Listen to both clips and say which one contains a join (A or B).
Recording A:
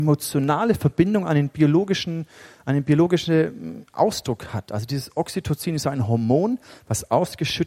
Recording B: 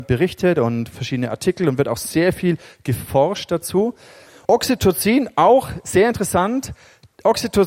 B